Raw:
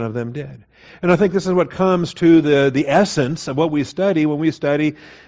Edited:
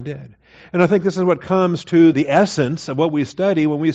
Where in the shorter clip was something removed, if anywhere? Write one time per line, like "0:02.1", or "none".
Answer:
0:02.1